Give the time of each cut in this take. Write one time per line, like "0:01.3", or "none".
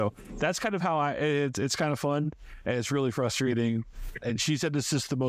0:04.2

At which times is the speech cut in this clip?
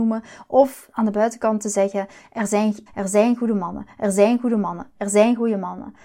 0:02.9

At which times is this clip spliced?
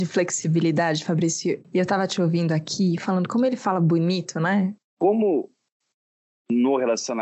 0:04.8

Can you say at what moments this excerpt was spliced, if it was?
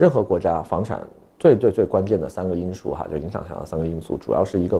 none

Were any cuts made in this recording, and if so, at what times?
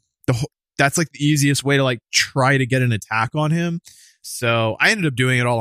none

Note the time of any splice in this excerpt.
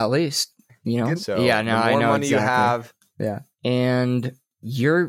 0:01.2
0:03.5

